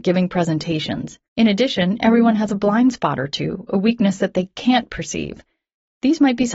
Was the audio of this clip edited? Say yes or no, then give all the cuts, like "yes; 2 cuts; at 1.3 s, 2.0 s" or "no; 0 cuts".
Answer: yes; 1 cut; at 1.3 s